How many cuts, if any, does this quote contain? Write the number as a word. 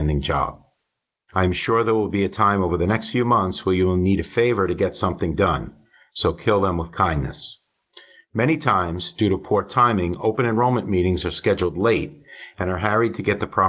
one